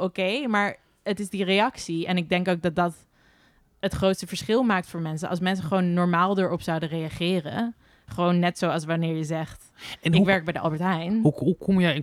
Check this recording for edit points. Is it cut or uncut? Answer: uncut